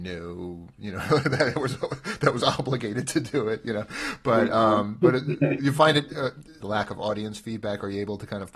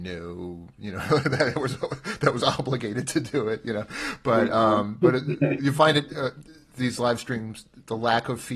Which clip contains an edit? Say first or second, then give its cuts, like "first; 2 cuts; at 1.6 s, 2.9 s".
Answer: first; 1 cut; at 6.6 s